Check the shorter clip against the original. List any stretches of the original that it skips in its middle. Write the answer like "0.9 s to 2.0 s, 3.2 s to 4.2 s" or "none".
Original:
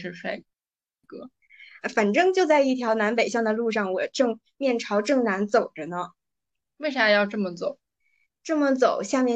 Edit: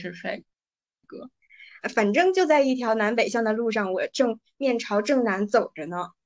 none